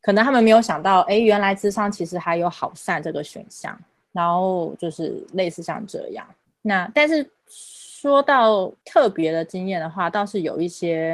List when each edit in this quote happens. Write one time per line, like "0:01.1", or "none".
0:04.1